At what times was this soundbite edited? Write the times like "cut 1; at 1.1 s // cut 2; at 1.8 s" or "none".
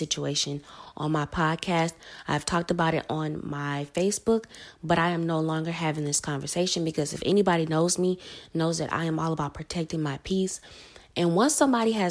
none